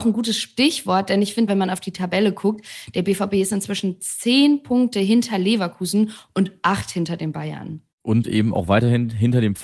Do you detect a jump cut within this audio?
yes; 2 cuts; at 1.5 s, 7.9 s

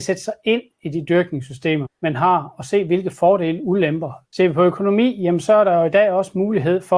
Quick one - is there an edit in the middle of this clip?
yes; 2 cuts; at 1.8 s, 4.2 s

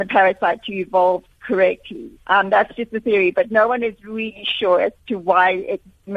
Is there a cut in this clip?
yes; 1 cut; at 2.2 s

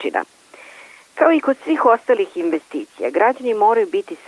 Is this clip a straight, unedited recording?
yes; 0 cuts

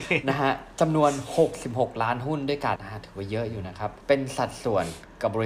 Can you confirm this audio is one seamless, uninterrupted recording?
no; 2 cuts; at 2.8 s, 4.0 s

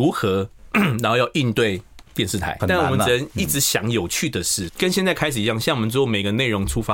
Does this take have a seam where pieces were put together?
yes; 2 cuts; at 2.6 s, 4.7 s

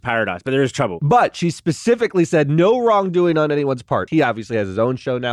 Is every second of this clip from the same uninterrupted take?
no; 1 cut; at 4.1 s

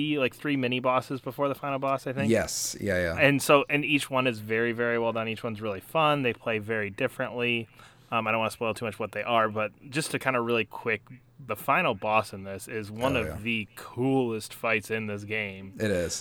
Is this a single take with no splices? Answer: no; 1 cut; at 11.5 s

